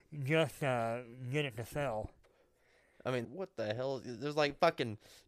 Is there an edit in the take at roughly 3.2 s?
yes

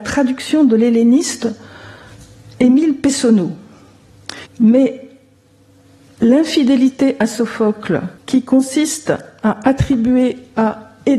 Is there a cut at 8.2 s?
yes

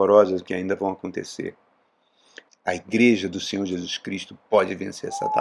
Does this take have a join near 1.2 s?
no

